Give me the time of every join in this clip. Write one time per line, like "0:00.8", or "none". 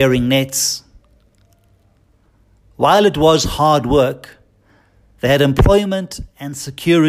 none